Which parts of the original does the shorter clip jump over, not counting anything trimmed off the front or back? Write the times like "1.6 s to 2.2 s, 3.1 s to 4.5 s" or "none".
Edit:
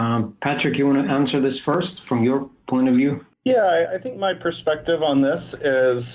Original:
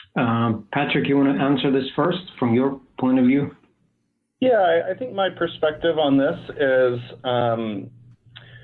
3.6 s to 4.3 s